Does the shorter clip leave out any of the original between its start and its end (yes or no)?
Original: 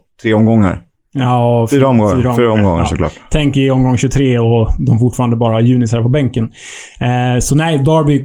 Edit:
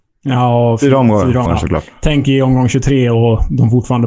yes